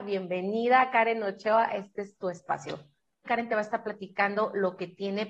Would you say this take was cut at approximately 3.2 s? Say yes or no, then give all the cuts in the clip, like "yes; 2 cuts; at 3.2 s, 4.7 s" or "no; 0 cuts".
yes; 1 cut; at 3.2 s